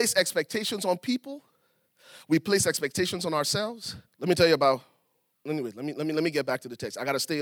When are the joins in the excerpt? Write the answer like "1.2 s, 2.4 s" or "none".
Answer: 4.1 s

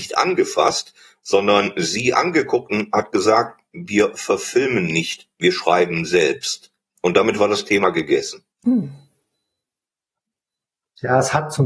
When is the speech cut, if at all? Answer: 8.5 s

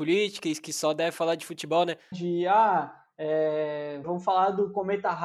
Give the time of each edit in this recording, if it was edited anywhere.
2.1 s, 4.0 s

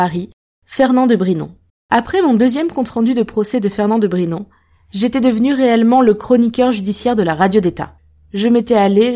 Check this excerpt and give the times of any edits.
1.7 s

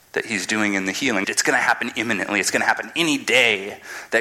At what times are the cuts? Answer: 1.2 s

